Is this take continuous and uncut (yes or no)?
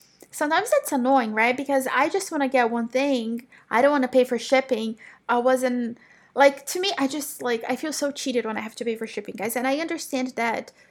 no